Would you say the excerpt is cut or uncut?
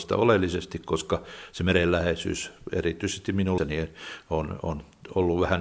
cut